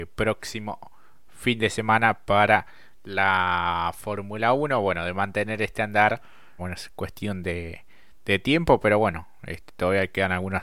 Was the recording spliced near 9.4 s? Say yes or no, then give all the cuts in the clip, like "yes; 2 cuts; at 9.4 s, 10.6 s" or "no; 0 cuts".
no; 1 cut; at 6.6 s